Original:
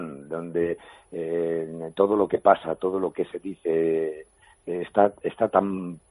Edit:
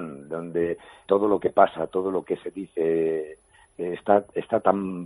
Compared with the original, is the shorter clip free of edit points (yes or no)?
no